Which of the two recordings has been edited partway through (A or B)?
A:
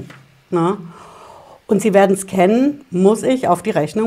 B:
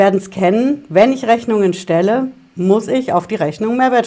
A